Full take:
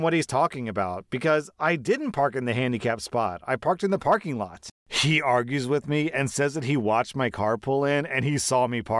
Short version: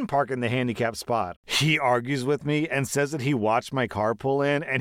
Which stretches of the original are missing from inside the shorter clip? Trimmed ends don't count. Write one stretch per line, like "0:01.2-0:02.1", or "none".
0:03.4-0:04.8